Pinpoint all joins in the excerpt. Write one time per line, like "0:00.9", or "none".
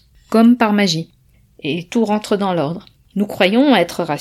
0:03.0